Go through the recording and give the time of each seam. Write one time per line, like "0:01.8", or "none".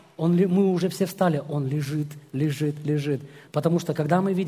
0:03.5